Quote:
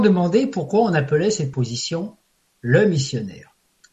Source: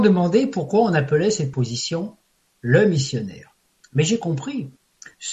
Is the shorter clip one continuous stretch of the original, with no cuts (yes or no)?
yes